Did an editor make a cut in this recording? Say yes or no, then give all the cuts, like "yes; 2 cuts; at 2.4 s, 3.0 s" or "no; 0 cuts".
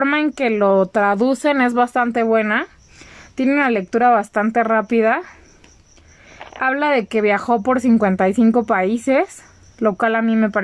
no; 0 cuts